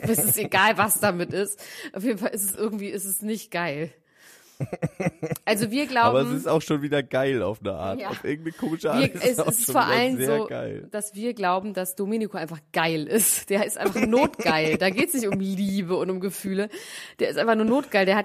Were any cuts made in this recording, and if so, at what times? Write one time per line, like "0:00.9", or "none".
none